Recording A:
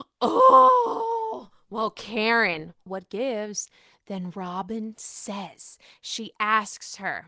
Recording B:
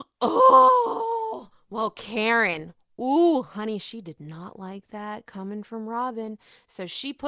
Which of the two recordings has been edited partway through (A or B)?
A